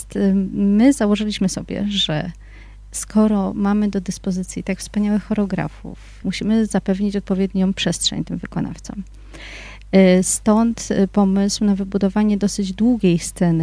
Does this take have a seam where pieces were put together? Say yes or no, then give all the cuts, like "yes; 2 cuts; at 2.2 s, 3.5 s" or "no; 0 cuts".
yes; 1 cut; at 6.2 s